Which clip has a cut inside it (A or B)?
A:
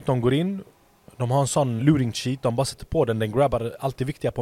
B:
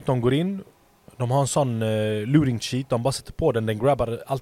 A